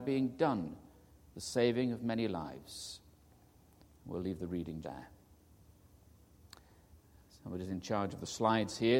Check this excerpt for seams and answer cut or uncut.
cut